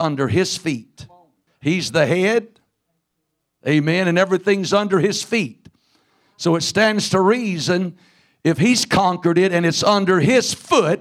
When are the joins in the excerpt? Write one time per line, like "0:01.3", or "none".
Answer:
0:01.5